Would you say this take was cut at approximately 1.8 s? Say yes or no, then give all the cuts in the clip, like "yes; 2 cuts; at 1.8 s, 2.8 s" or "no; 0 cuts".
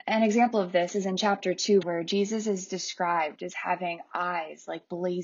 yes; 1 cut; at 1.8 s